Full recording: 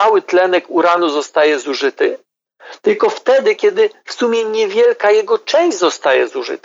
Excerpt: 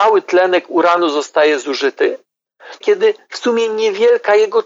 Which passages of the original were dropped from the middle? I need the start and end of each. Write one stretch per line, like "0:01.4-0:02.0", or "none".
0:02.8-0:03.6